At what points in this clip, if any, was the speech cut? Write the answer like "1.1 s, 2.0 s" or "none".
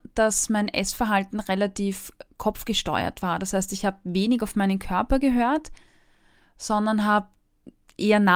none